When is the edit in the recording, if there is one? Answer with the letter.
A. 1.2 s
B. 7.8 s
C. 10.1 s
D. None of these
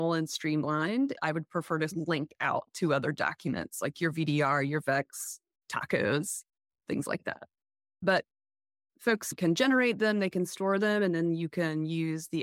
B